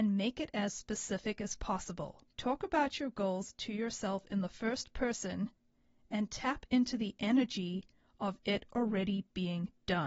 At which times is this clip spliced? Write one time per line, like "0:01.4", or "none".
0:02.3